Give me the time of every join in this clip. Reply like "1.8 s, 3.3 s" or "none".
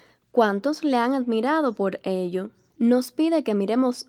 2.7 s

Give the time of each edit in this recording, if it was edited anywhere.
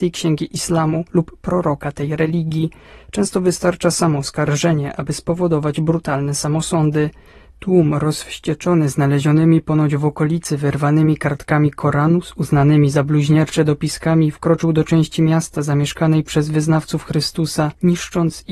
7.5 s

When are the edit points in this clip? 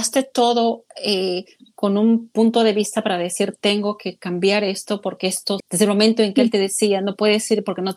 5.6 s

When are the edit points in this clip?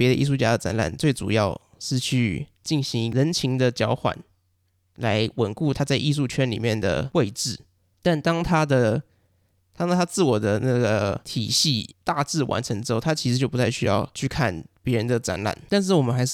7.9 s

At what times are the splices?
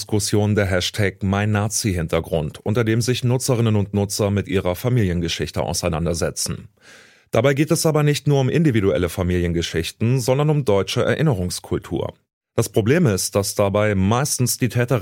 none

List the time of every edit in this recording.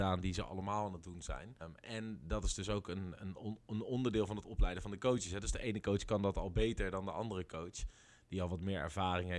1.6 s

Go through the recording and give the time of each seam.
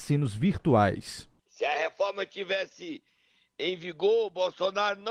1.4 s

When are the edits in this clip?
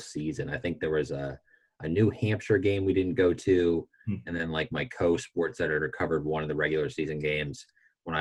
none

